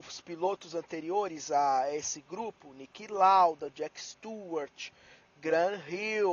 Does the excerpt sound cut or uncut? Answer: uncut